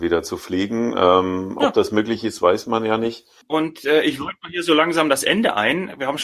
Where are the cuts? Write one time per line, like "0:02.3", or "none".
0:03.4